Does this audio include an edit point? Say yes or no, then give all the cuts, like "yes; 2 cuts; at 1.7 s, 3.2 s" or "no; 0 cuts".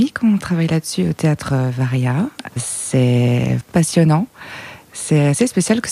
yes; 2 cuts; at 2.5 s, 3.6 s